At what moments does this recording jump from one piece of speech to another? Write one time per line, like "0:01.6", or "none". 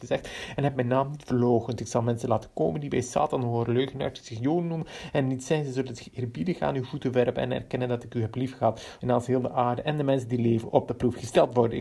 0:09.0